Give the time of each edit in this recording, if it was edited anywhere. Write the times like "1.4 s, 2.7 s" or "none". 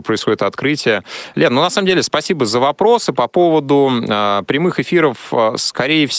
none